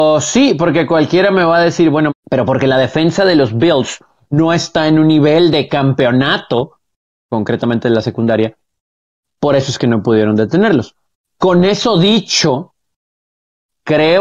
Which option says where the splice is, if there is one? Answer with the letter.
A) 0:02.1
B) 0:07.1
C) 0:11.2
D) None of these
A